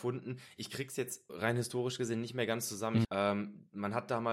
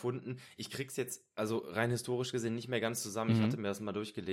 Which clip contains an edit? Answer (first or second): first